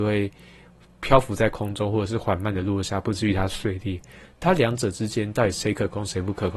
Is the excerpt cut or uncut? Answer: cut